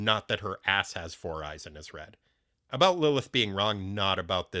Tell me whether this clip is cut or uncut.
cut